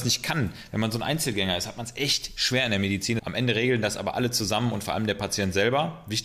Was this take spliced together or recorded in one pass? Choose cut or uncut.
cut